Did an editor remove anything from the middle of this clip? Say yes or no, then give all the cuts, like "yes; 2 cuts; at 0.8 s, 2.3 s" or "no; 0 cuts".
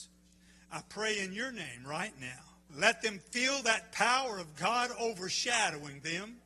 yes; 1 cut; at 2.7 s